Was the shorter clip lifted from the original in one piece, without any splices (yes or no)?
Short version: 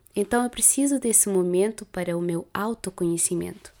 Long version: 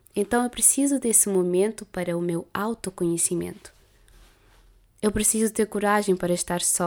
yes